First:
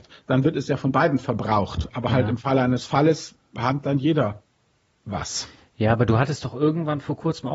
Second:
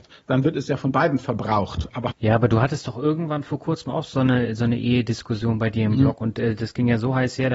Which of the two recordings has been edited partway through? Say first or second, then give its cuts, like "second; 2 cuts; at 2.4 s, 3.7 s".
second; 1 cut; at 2.1 s